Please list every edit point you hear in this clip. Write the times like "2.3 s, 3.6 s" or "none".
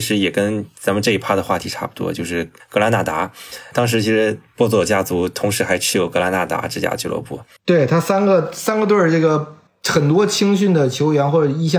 none